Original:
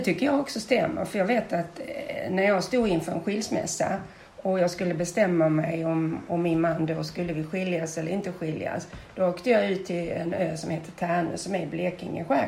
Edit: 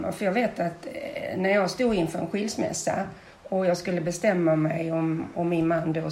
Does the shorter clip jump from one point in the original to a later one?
no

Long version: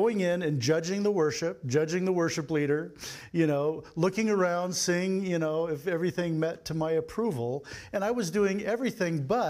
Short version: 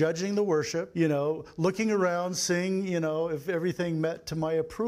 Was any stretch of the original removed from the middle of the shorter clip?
yes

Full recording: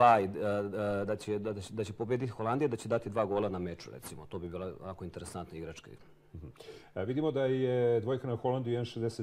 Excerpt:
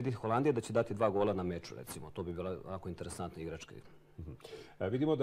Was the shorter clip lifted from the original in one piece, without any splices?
yes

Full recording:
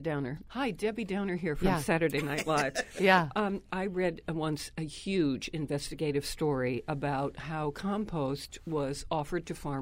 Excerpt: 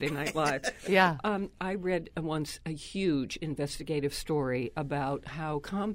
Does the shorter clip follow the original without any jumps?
yes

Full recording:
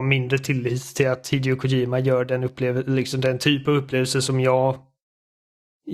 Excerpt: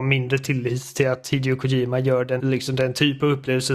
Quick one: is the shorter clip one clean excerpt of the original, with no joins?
no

